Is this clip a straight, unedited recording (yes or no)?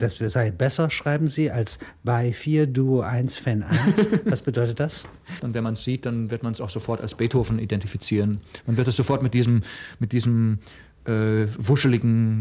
no